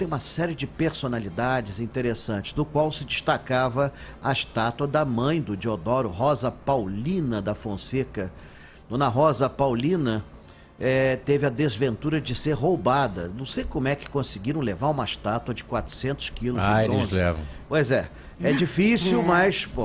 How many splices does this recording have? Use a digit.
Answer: 0